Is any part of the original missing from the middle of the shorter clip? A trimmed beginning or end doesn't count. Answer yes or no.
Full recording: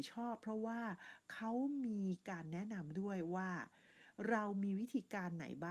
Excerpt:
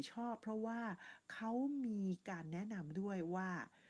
no